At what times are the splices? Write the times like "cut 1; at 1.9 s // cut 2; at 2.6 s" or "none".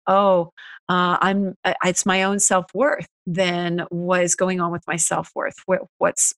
cut 1; at 3.2 s